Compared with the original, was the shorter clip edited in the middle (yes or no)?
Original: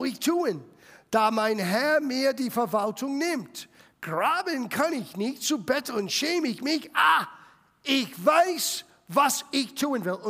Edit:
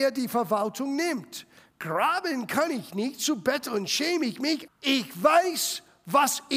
yes